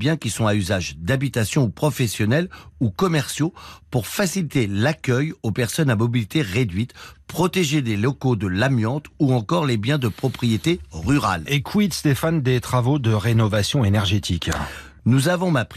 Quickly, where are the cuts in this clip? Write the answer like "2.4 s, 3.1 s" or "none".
none